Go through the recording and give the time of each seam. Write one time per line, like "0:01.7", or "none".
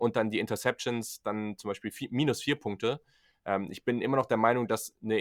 none